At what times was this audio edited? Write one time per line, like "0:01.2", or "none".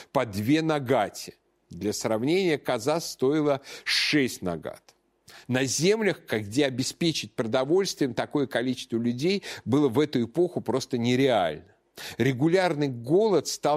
0:05.4